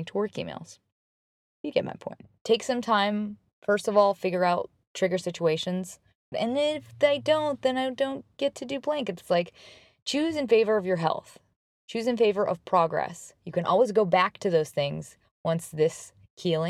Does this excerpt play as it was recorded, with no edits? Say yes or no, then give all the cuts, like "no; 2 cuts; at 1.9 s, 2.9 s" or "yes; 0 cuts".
no; 1 cut; at 6.3 s